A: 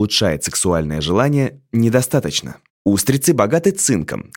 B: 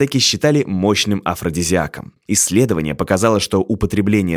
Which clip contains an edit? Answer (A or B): B